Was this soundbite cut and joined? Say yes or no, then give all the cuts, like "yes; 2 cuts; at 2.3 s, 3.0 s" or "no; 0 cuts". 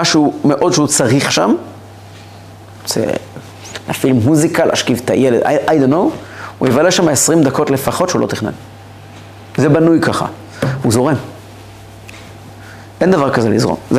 no; 0 cuts